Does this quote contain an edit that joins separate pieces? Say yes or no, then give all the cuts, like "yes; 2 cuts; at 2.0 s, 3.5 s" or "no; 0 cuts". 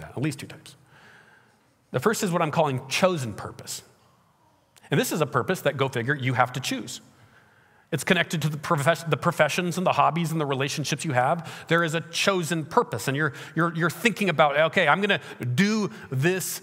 no; 0 cuts